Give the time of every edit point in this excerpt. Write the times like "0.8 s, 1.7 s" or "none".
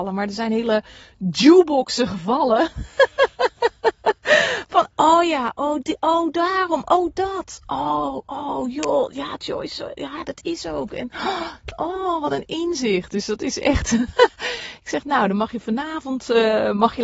none